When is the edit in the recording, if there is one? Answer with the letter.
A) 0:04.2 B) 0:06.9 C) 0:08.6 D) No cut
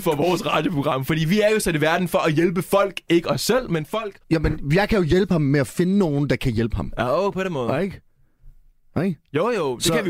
A